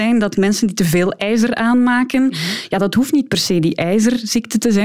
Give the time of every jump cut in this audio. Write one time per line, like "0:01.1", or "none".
none